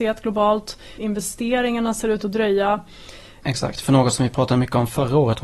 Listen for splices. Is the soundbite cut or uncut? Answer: cut